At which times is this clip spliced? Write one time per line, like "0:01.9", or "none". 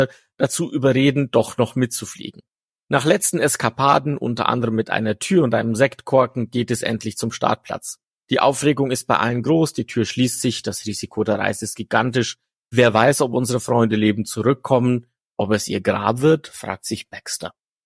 none